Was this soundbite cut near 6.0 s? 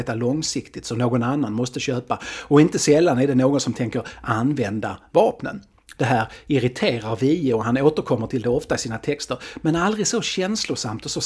yes; 1 cut; at 6.0 s

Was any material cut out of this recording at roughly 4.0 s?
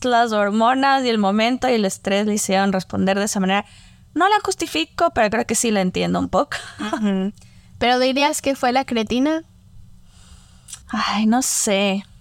no; 1 cut; at 10.8 s

